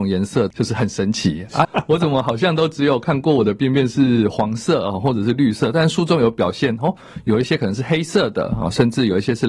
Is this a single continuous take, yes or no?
no